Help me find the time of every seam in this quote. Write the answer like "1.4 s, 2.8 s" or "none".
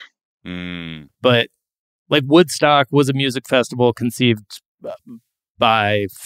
1.1 s